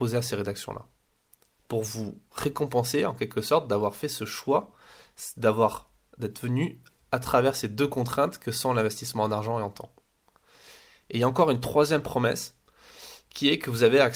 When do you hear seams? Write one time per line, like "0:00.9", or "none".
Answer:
none